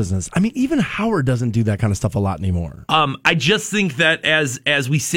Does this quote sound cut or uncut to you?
uncut